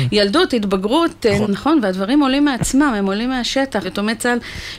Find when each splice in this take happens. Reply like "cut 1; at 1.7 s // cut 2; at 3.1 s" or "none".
cut 1; at 1.4 s // cut 2; at 3.8 s